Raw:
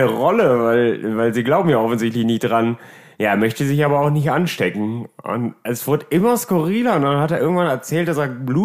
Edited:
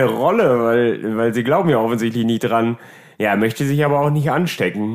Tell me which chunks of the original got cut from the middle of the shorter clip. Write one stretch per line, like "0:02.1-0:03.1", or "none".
none